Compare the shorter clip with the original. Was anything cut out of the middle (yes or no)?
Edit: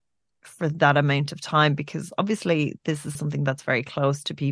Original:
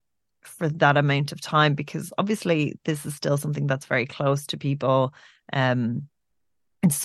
yes